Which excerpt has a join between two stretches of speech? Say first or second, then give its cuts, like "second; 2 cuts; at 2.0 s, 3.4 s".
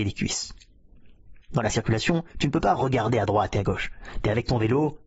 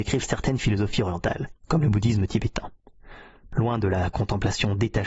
first; 1 cut; at 1.4 s